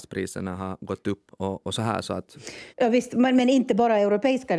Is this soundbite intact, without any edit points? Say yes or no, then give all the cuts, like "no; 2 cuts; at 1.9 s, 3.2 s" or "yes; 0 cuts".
no; 2 cuts; at 1.3 s, 2.7 s